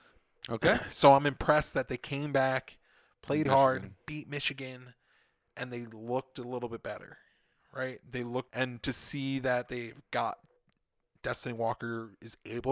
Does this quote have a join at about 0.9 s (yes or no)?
no